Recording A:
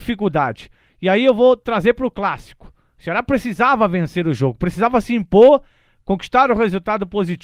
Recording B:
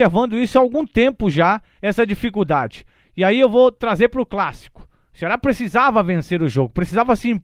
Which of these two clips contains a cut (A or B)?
B